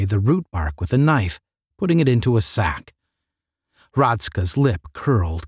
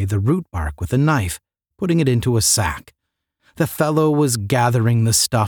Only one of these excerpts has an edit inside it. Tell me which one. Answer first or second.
second